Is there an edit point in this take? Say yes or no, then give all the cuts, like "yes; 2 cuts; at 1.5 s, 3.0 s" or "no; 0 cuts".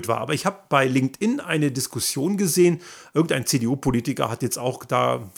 no; 0 cuts